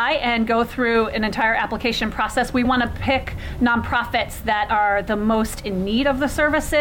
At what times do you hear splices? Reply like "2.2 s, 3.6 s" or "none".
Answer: 2.6 s